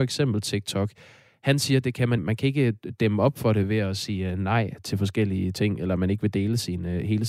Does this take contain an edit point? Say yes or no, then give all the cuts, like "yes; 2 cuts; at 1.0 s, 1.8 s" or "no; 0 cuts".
yes; 1 cut; at 2.2 s